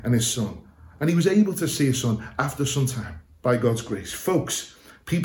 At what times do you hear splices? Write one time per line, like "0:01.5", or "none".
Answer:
none